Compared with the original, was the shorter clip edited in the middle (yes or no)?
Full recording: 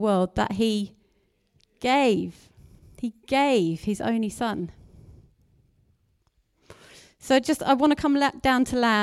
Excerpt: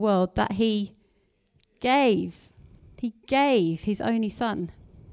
no